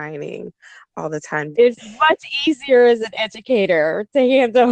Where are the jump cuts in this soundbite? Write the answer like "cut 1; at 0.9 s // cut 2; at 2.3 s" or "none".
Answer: cut 1; at 1.5 s